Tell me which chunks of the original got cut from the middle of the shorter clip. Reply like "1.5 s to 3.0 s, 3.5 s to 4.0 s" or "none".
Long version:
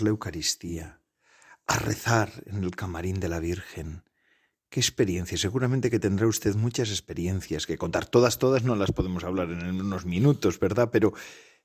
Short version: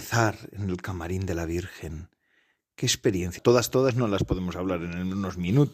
5.3 s to 8.0 s